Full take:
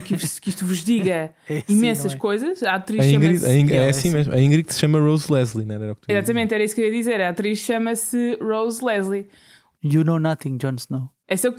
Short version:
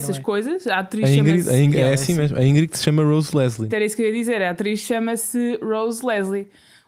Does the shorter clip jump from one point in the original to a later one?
yes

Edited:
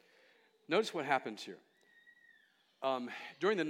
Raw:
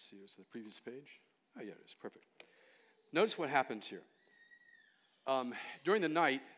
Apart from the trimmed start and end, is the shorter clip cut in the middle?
no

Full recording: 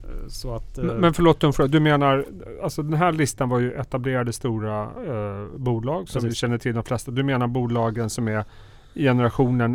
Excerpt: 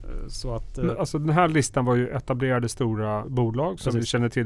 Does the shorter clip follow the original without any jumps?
no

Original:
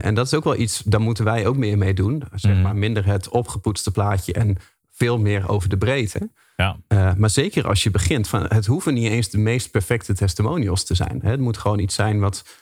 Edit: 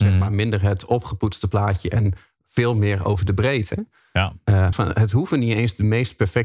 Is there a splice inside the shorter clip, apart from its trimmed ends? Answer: yes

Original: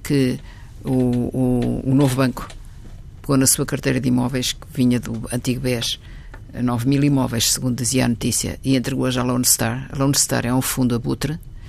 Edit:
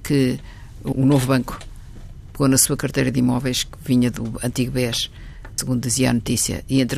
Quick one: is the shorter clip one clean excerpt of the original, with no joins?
no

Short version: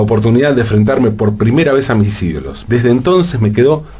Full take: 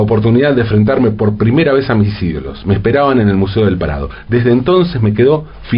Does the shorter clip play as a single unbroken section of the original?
no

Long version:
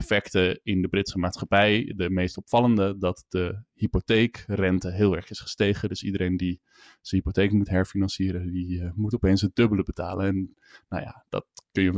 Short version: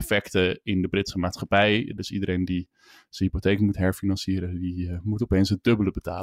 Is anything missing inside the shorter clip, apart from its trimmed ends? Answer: yes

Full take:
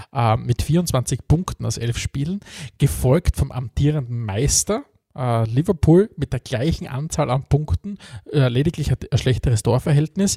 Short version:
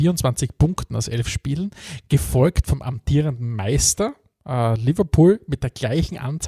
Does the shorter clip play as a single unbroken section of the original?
yes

